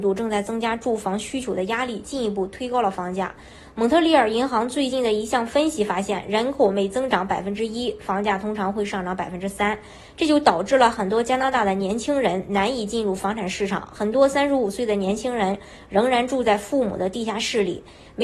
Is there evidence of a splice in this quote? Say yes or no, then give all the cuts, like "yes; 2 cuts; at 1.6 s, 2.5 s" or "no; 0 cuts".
no; 0 cuts